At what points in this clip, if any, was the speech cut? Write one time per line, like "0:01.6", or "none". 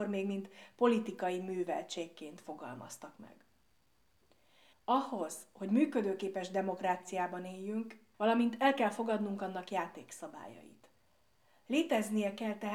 0:04.7
0:08.1